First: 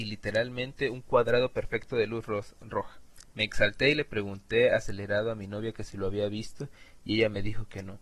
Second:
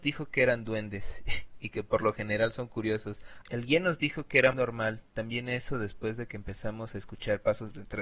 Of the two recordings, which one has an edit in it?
second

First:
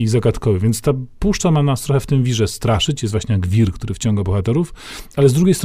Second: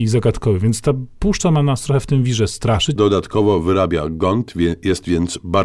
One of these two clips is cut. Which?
second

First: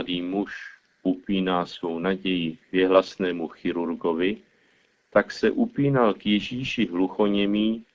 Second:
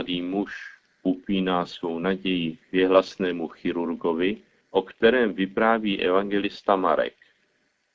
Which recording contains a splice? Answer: second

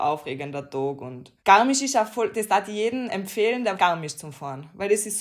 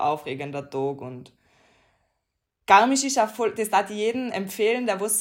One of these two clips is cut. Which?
first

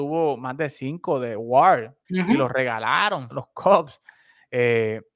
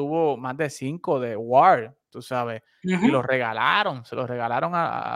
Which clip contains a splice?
first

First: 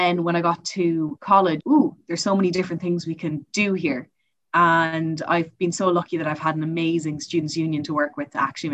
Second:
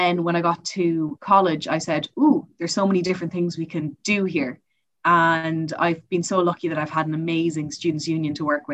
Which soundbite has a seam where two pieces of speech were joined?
first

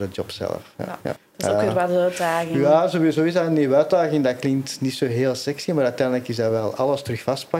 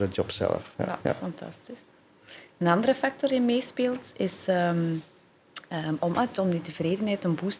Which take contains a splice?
first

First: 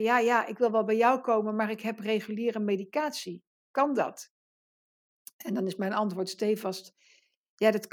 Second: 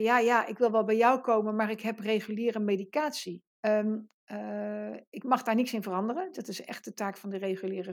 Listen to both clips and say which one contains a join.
second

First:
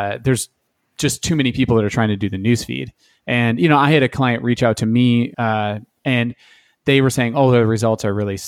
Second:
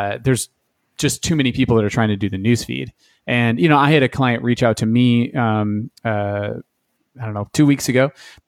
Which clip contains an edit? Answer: first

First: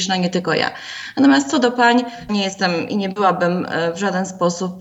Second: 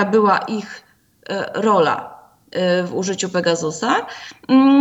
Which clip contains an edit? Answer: first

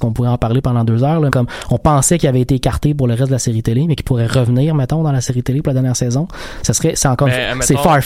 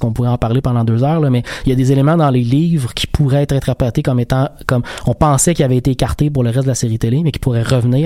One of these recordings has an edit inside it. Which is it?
first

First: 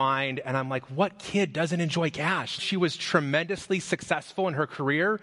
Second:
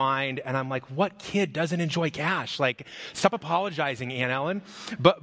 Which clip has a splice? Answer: first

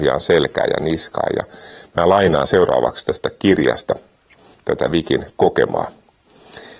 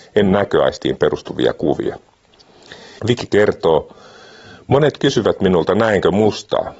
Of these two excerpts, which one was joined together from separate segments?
second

